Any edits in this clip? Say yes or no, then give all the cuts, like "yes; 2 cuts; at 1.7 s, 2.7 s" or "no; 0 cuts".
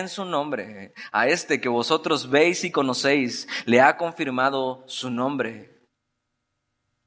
no; 0 cuts